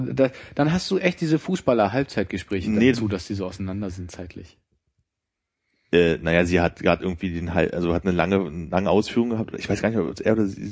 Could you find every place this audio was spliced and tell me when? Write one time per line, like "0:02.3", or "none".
0:02.9